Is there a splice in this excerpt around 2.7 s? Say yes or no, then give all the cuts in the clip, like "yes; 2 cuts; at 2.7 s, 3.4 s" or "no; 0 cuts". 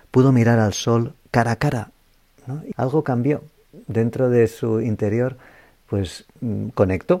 yes; 1 cut; at 2.7 s